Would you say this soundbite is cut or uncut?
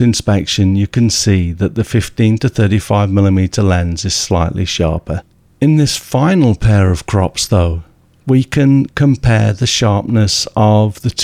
cut